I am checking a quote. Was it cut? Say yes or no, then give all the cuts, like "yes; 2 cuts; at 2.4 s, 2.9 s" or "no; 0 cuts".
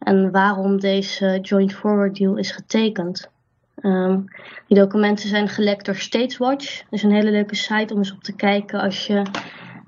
no; 0 cuts